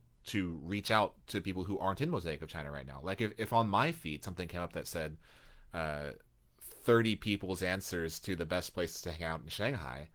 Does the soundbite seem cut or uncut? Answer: uncut